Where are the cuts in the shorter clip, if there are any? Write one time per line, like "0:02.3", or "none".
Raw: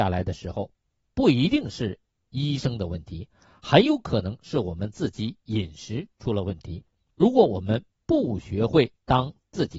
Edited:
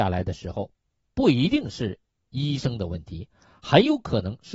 none